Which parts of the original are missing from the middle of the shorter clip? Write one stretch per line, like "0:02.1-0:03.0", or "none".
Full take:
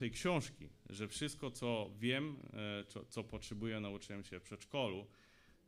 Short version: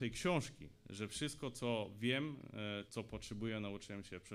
0:02.9-0:03.1